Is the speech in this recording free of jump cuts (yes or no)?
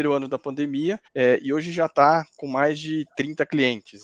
no